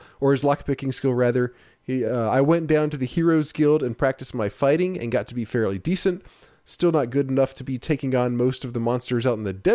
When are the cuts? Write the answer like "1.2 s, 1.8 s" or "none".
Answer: none